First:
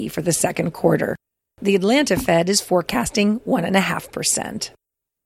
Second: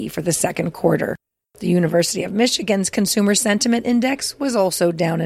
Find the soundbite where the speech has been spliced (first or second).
second